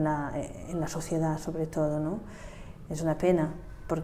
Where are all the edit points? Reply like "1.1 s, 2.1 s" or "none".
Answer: 2.9 s